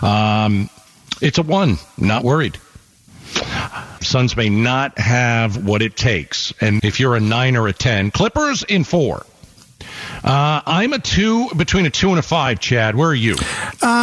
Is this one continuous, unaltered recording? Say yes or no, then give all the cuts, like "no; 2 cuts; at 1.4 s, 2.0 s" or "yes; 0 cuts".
no; 2 cuts; at 4.0 s, 6.8 s